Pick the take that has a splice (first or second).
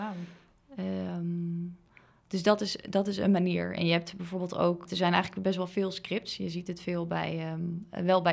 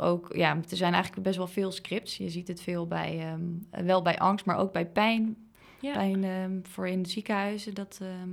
first